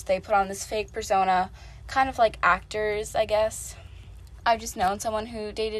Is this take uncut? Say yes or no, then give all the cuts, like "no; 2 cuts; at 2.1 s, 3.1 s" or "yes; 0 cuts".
no; 1 cut; at 4.4 s